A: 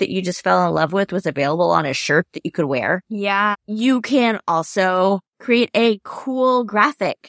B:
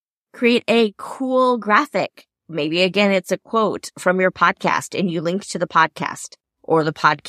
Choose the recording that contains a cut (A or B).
A